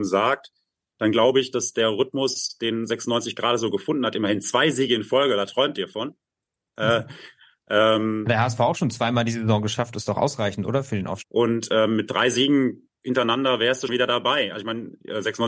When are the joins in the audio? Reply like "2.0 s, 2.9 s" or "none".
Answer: 11.2 s, 13.9 s